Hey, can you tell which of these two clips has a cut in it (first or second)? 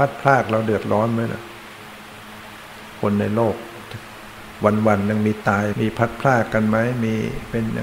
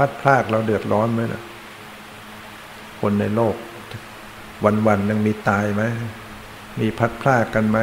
first